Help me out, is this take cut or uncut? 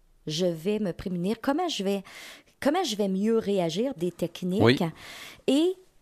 cut